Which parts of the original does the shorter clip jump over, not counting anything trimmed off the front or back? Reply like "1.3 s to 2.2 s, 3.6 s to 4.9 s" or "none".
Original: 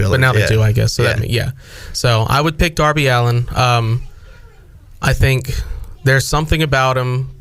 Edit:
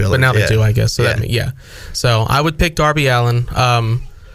none